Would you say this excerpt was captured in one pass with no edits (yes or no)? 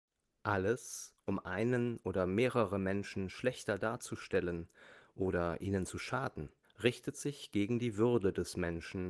no